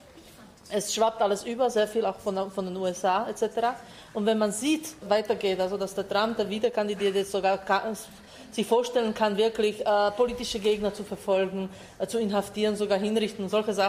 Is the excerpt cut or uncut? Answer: cut